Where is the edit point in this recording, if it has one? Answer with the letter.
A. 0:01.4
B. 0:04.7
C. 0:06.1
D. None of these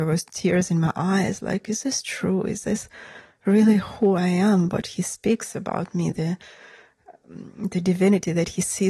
C